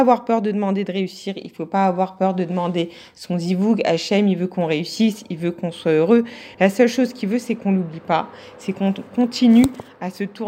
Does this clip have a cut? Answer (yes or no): no